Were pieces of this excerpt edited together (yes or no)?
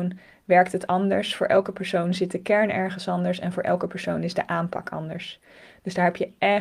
no